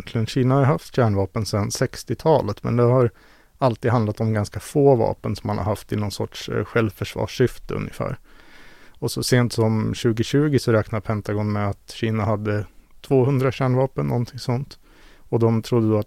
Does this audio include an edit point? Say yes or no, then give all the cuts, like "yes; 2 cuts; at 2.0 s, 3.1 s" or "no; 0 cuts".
no; 0 cuts